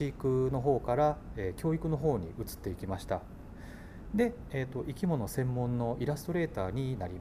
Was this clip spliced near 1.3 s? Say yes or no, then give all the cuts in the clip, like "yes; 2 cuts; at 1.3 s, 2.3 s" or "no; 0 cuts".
no; 1 cut; at 4.5 s